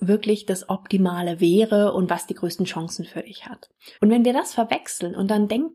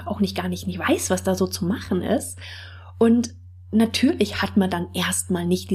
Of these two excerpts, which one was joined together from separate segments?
first; 1 cut; at 3.9 s

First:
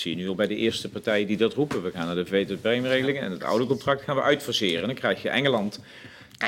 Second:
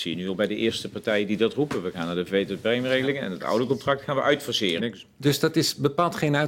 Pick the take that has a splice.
second; 1 cut; at 4.8 s

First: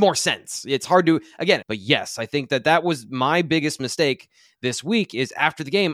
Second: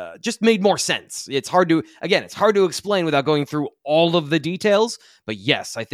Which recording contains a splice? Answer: first; 1 cut; at 1.6 s

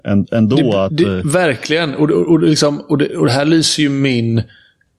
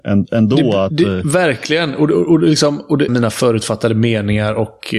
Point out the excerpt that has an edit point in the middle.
second; 1 cut; at 3.1 s

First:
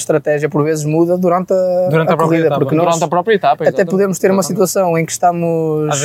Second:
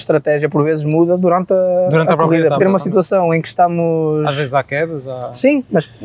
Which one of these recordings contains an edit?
second; 1 cut; at 2.6 s

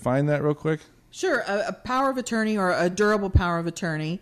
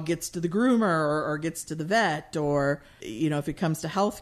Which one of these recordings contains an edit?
second; 1 cut; at 3.0 s

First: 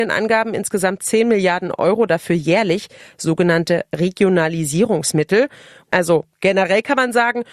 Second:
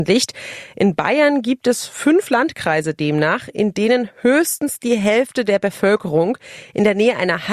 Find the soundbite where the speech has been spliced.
first; 1 cut; at 5.8 s

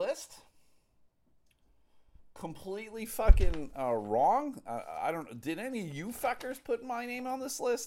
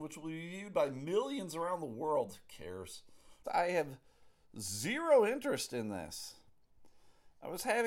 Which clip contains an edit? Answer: second; 1 cut; at 3.4 s

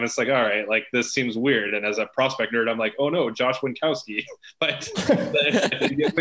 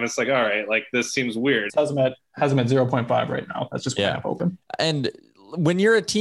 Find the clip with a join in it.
second; 1 cut; at 1.7 s

